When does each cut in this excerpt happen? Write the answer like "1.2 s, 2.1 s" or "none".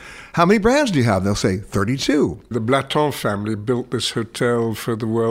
2.5 s